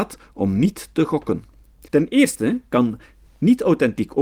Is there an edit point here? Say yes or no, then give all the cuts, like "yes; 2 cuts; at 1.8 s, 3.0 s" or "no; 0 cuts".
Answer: yes; 1 cut; at 1.9 s